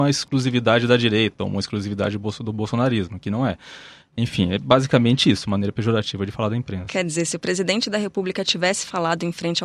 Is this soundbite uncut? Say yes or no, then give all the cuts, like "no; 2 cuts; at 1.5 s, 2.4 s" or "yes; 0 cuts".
yes; 0 cuts